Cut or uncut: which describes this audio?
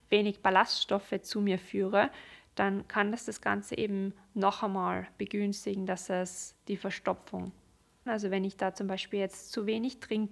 cut